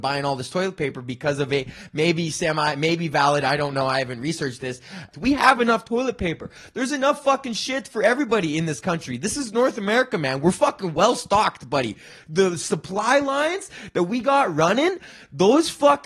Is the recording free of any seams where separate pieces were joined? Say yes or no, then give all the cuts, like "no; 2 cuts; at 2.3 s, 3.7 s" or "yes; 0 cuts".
no; 1 cut; at 5.1 s